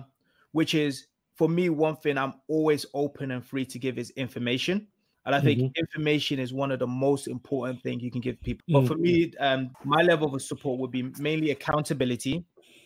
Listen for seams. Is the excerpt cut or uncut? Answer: cut